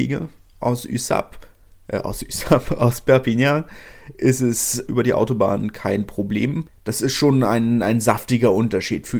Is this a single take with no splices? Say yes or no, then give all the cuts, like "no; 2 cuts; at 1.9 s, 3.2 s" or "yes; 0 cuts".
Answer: no; 2 cuts; at 4.9 s, 6.7 s